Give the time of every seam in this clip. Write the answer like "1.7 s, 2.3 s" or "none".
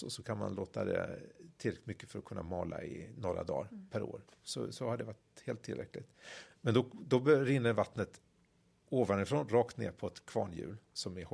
none